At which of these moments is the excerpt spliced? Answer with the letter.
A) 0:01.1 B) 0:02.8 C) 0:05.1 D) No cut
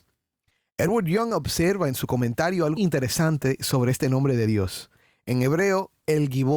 B